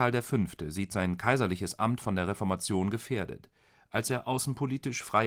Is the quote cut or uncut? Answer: uncut